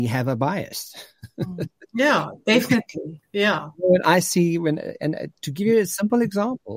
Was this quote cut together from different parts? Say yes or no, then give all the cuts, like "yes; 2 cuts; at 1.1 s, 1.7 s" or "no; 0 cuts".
no; 0 cuts